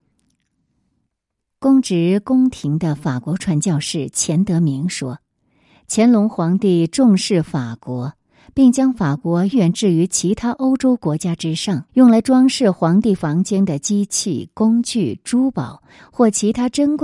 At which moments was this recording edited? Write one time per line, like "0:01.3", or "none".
0:09.5
0:11.9